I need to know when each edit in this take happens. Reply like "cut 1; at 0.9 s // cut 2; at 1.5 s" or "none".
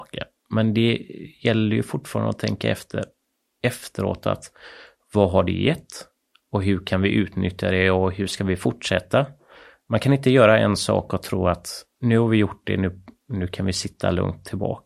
none

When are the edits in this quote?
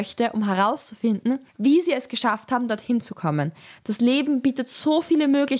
cut 1; at 1.5 s

